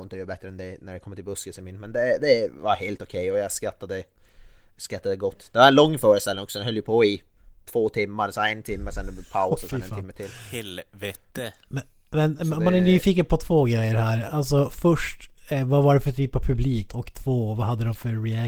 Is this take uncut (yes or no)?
no